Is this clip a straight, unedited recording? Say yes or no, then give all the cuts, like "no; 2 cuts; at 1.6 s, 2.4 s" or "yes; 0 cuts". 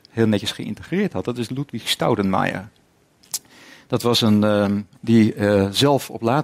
no; 1 cut; at 4.9 s